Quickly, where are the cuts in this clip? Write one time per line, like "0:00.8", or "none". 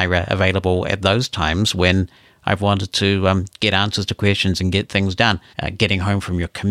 0:05.5